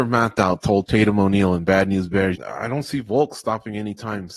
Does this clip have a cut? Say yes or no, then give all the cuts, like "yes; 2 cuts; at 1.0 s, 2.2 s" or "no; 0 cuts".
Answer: yes; 1 cut; at 2.4 s